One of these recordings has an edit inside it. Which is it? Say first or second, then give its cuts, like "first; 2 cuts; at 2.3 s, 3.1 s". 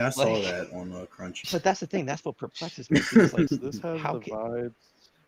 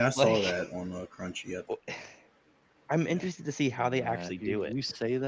first; 2 cuts; at 1.4 s, 3.5 s